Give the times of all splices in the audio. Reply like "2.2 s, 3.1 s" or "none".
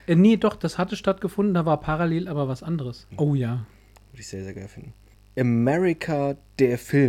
3.1 s